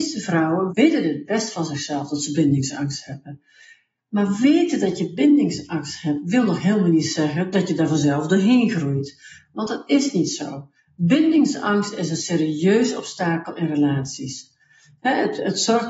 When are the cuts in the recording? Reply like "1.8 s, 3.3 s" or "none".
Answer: none